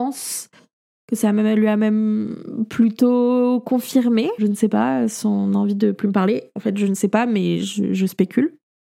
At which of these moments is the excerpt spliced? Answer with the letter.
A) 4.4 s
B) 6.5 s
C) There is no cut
A